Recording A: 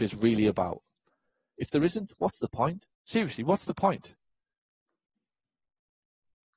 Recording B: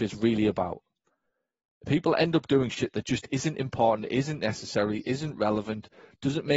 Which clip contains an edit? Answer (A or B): A